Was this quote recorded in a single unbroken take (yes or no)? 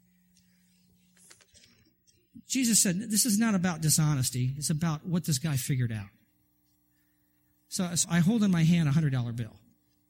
no